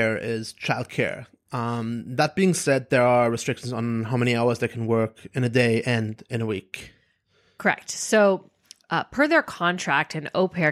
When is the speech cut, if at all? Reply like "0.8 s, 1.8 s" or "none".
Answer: none